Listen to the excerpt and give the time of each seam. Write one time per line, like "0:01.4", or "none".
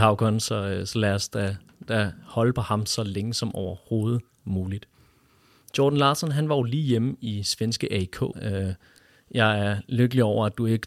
0:08.3